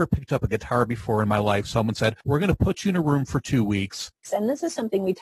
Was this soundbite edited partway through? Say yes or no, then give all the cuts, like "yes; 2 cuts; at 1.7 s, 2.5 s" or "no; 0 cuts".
yes; 1 cut; at 4.2 s